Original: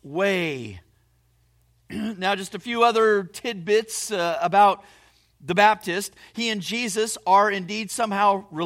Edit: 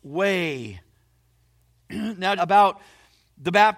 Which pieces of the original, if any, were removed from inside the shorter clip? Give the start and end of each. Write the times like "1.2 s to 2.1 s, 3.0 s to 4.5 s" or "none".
2.4 s to 4.4 s